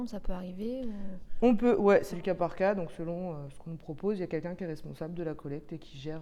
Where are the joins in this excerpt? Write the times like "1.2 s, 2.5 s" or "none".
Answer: 2.1 s